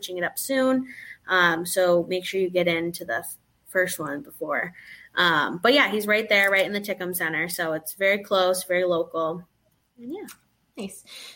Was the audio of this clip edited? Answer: no; 0 cuts

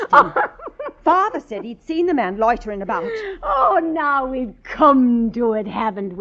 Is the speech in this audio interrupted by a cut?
no; 0 cuts

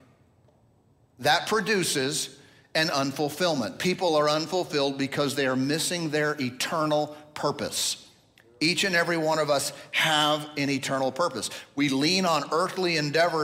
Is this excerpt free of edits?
yes; 0 cuts

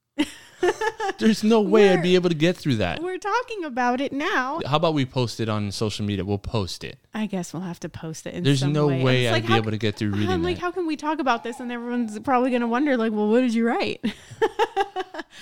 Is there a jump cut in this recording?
yes; 1 cut; at 4.6 s

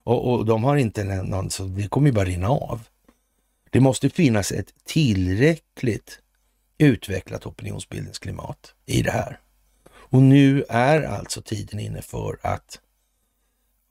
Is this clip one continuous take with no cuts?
no; 1 cut; at 8.8 s

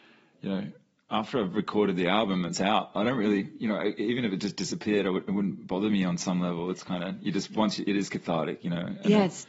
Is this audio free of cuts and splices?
yes; 0 cuts

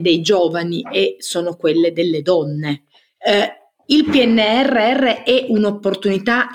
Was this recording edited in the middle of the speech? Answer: no; 0 cuts

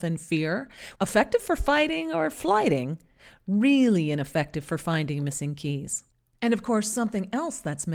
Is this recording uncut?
no; 1 cut; at 1.0 s

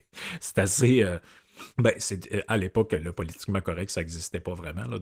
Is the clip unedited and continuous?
no; 1 cut; at 1.7 s

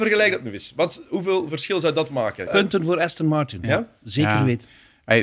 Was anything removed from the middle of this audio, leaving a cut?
yes; 1 cut; at 2.5 s

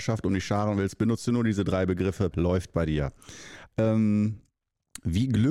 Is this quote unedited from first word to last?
no; 2 cuts; at 2.3 s, 3.7 s

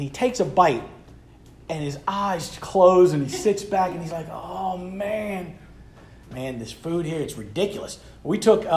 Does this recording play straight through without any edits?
no; 1 cut; at 6.2 s

